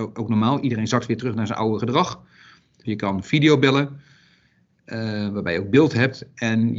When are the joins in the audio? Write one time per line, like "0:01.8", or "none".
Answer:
0:02.8